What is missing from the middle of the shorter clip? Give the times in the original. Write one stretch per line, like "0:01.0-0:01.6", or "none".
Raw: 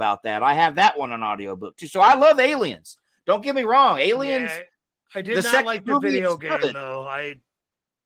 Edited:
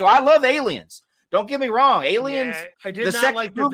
0:04.7-0:05.0